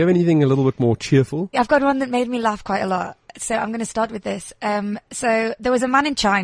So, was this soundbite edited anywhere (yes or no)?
yes